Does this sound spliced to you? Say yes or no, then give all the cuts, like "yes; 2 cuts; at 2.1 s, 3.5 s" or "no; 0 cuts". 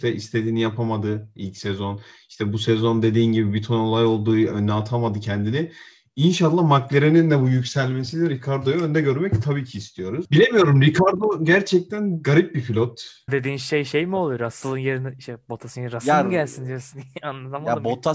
yes; 2 cuts; at 10.2 s, 13.3 s